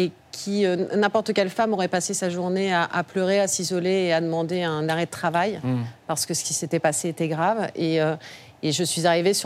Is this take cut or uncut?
uncut